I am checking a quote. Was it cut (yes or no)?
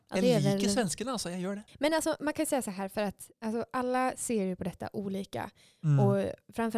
yes